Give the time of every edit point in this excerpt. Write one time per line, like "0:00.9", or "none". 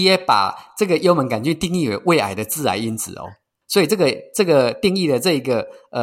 0:03.6